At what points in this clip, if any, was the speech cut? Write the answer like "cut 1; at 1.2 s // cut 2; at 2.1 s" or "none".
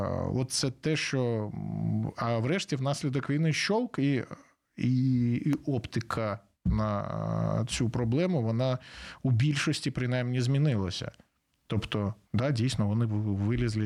cut 1; at 12.2 s